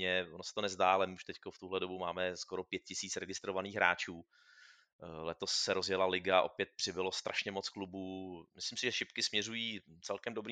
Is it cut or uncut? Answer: uncut